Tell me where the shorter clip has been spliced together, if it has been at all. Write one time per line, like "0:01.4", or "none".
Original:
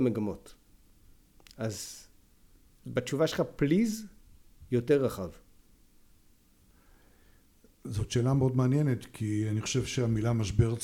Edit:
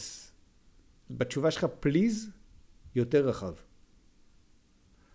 none